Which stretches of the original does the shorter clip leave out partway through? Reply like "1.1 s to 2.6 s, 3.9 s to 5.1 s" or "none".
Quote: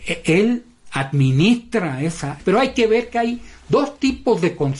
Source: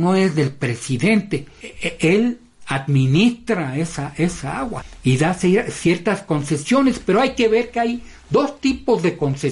4.1 s to 7.0 s